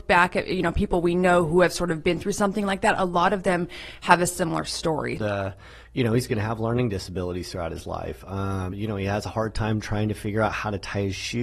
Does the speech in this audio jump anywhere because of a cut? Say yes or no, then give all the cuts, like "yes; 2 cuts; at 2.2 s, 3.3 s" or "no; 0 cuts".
yes; 2 cuts; at 5.2 s, 8.7 s